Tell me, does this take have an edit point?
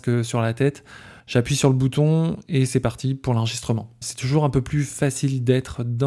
yes; 2 cuts; at 1.2 s, 4.0 s

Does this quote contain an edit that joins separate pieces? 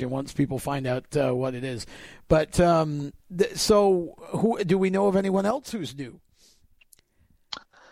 no; 0 cuts

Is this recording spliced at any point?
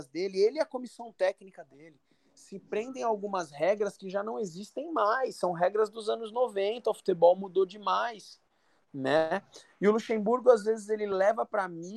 no; 0 cuts

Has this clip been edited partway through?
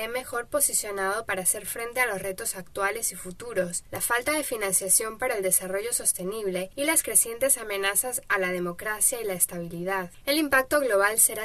yes; 2 cuts; at 3.9 s, 10.2 s

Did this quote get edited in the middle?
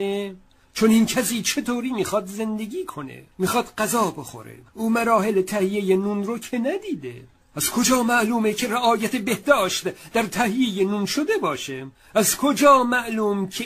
yes; 1 cut; at 3.3 s

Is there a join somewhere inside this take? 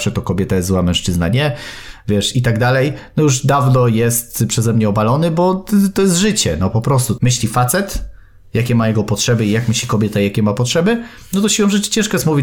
yes; 1 cut; at 7.2 s

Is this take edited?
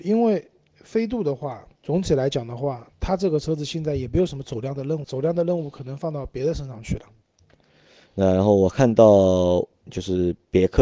yes; 2 cuts; at 1.8 s, 5.0 s

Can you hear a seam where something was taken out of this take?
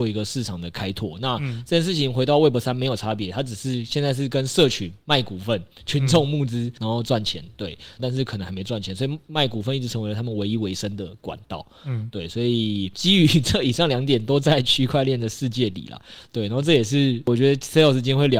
yes; 1 cut; at 8.0 s

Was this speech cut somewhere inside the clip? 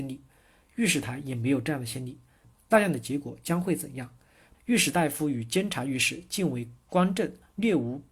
yes; 2 cuts; at 2.4 s, 4.5 s

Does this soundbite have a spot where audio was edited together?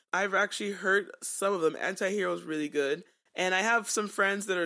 no; 0 cuts

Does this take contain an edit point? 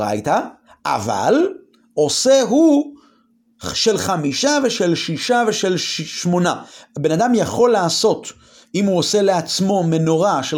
no; 0 cuts

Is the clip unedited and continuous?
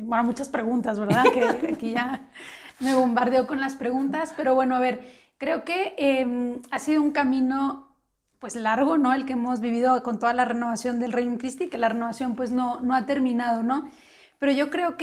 yes; 0 cuts

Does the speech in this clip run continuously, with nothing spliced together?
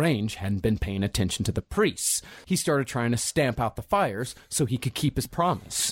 no; 1 cut; at 2.4 s

